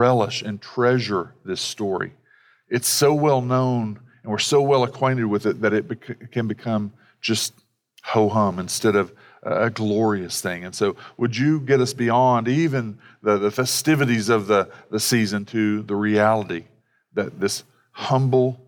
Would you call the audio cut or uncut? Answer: uncut